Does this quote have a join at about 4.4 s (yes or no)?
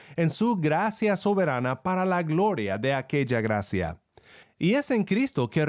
yes